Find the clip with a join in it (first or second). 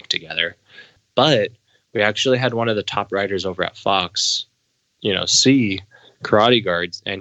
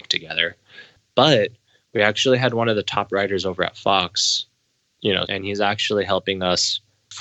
second